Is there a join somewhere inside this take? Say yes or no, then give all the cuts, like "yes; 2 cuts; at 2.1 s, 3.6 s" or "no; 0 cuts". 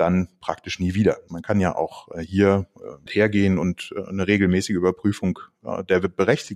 yes; 2 cuts; at 1.3 s, 3.1 s